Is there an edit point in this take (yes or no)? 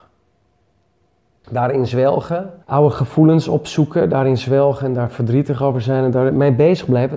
yes